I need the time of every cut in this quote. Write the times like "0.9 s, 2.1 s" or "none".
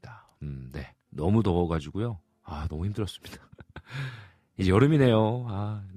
1.1 s